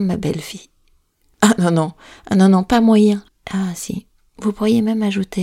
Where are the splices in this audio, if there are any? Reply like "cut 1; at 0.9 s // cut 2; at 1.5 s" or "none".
cut 1; at 3.3 s